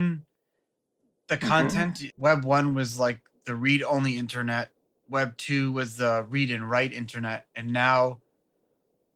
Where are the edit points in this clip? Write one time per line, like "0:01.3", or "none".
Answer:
0:02.1